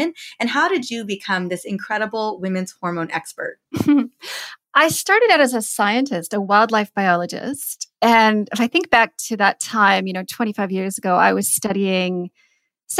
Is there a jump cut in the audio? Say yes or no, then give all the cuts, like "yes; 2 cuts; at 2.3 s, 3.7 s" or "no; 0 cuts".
no; 0 cuts